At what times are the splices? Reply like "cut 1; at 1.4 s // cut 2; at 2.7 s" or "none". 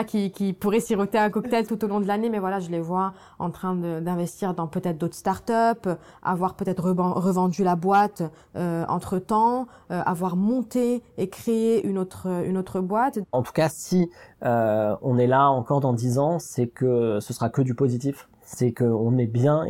none